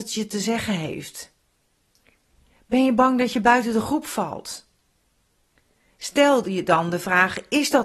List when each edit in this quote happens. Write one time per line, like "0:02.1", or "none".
none